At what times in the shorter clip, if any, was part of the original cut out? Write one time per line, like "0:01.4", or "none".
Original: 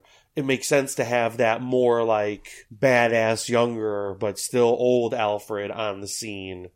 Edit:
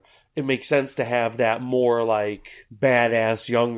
none